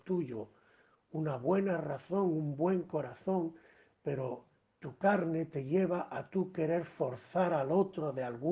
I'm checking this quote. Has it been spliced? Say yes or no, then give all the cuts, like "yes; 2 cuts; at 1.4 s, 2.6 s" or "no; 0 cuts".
no; 0 cuts